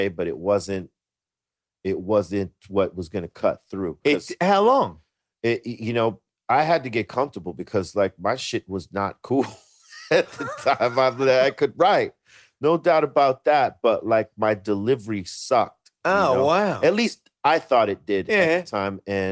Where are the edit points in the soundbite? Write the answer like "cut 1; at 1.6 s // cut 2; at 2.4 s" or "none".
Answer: cut 1; at 4.0 s